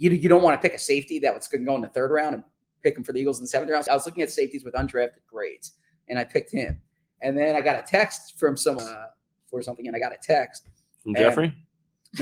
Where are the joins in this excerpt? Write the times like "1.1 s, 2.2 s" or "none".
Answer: 3.9 s, 8.8 s